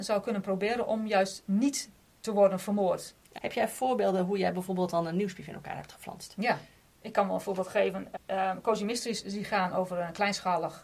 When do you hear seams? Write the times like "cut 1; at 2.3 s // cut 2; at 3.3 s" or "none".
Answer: cut 1; at 3.4 s // cut 2; at 8.2 s